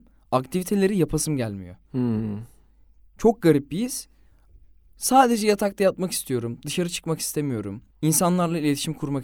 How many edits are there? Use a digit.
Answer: 1